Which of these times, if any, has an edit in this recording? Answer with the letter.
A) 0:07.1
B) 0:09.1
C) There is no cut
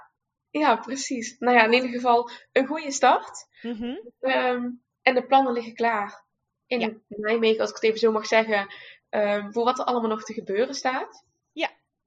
C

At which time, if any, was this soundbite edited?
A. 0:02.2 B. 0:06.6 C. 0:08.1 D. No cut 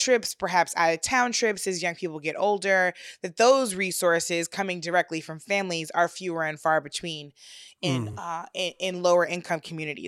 D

